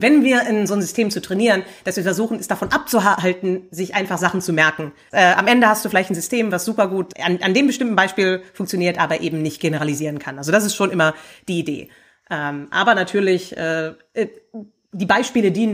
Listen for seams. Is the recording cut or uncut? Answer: uncut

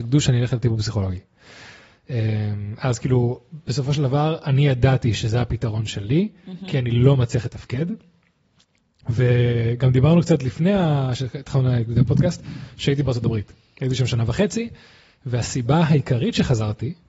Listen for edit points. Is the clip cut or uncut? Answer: uncut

